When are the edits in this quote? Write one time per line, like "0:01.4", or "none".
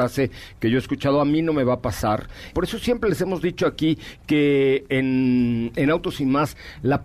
0:02.5